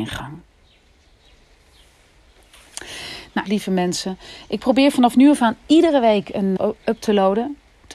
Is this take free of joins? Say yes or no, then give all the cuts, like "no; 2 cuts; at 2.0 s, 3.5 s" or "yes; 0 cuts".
no; 2 cuts; at 3.5 s, 6.6 s